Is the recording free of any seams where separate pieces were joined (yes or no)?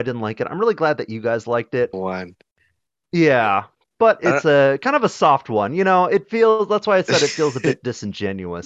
no